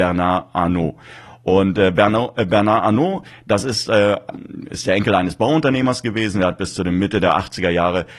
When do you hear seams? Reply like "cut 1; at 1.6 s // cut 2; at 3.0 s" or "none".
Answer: none